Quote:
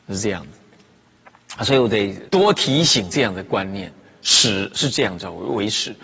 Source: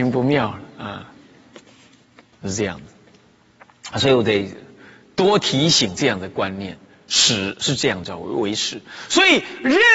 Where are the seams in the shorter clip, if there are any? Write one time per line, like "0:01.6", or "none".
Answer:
0:02.3